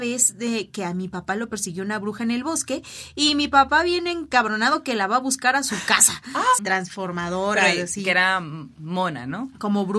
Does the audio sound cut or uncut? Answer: cut